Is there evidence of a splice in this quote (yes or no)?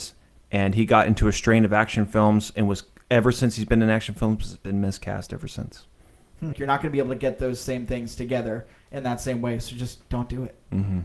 yes